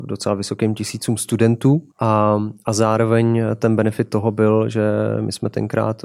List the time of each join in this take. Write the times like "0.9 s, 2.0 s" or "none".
1.9 s